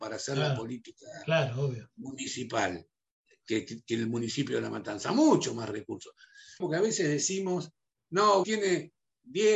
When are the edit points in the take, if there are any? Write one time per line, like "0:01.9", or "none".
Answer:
0:06.6
0:08.4

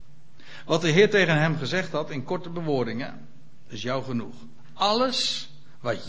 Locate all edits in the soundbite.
0:03.7

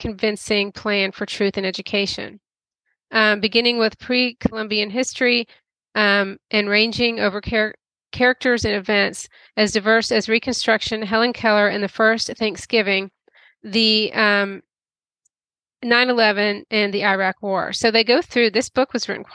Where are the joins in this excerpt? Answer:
none

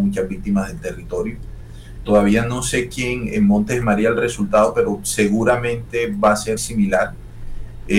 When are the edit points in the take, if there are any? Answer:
0:02.1
0:06.6

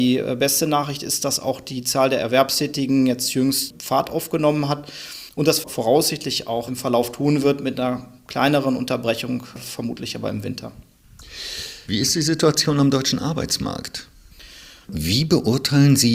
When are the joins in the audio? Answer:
0:06.7
0:11.8
0:14.8

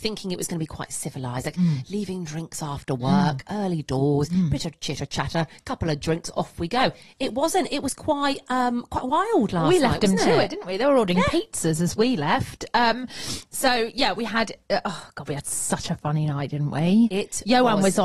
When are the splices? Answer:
none

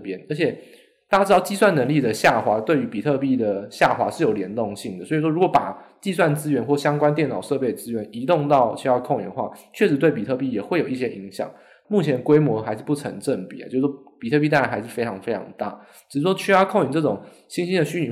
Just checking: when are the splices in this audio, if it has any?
0:11.8

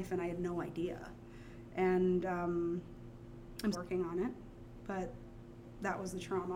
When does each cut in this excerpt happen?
0:03.7

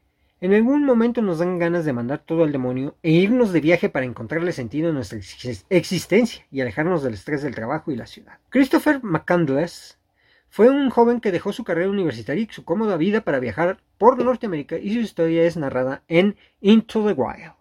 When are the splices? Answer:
0:08.5

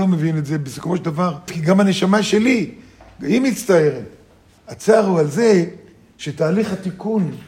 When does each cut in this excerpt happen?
0:01.5
0:04.6

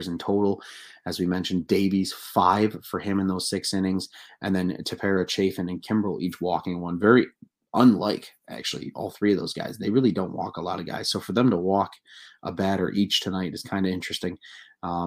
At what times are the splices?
none

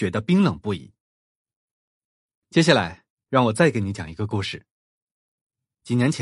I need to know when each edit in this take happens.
none

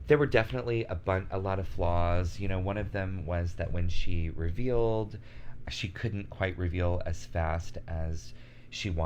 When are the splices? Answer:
0:05.6

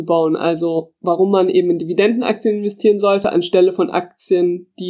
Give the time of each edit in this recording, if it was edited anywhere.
none

